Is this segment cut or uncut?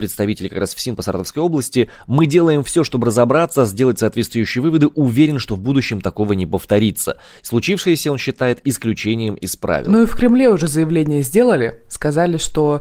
uncut